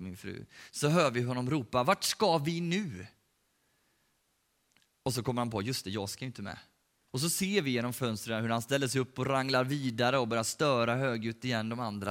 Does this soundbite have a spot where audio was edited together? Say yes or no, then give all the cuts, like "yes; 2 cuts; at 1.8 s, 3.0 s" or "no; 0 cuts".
yes; 1 cut; at 7.1 s